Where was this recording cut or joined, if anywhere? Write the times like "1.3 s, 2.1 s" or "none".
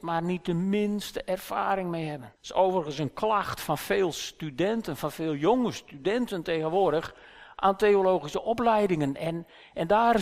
2.4 s